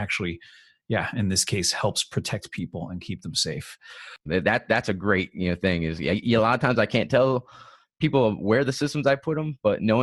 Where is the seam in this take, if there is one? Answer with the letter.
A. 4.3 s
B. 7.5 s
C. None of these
A